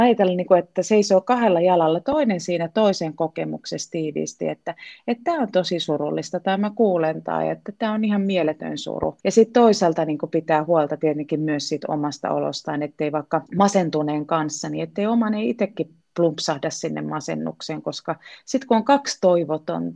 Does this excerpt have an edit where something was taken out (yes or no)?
yes